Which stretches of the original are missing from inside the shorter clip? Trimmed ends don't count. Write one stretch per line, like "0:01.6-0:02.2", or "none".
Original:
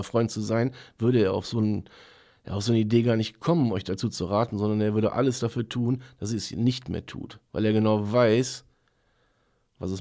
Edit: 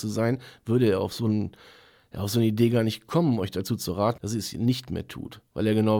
0:04.5-0:06.2